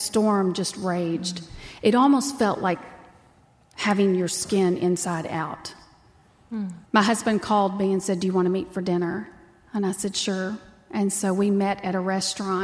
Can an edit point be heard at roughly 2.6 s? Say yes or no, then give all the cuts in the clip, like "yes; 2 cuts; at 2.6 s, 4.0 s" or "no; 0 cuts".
no; 1 cut; at 6.9 s